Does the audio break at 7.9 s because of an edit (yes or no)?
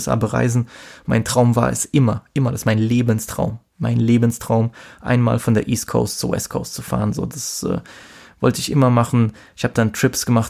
no